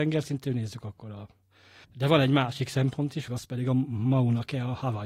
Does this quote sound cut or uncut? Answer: cut